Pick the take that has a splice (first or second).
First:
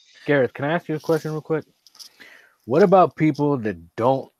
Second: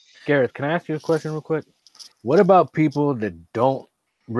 second